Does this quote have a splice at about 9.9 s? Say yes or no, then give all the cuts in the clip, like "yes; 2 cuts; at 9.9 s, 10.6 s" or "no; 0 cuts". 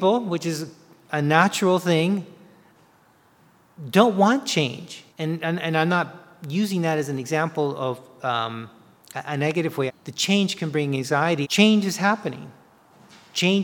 yes; 3 cuts; at 5.1 s, 9.9 s, 11.4 s